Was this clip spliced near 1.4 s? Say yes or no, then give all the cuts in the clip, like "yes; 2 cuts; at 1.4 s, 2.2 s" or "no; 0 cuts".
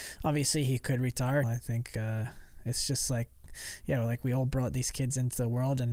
yes; 1 cut; at 1.4 s